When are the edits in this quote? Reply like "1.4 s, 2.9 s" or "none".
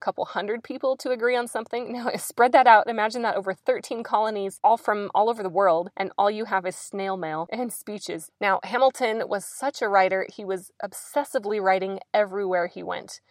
8.3 s